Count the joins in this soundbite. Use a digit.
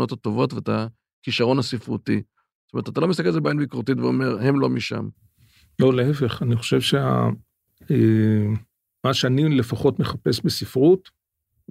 0